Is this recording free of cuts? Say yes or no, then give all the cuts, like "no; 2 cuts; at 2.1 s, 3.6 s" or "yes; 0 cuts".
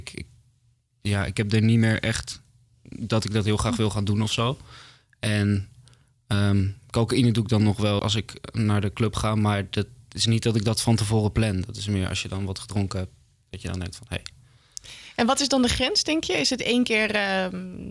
no; 1 cut; at 8.0 s